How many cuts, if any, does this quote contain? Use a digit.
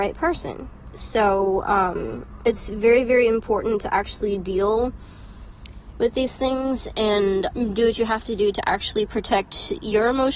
1